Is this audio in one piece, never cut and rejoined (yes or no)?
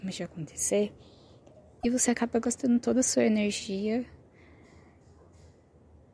yes